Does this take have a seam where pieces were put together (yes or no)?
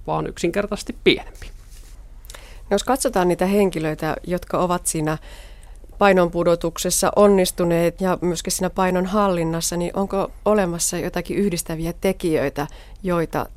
yes